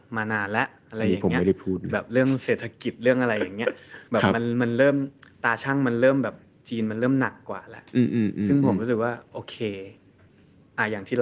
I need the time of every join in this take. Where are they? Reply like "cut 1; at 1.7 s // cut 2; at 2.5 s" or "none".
none